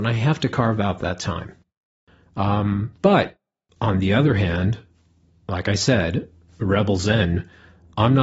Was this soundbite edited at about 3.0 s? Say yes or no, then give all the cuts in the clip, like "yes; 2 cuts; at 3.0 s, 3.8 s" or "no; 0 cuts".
no; 0 cuts